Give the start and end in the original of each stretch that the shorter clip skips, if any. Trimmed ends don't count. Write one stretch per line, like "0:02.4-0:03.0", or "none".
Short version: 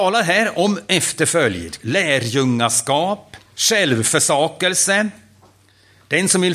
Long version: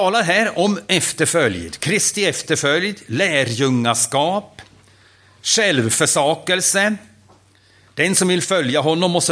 0:01.8-0:03.0
0:04.7-0:05.3